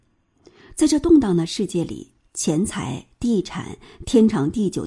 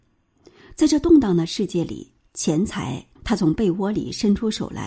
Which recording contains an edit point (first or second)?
second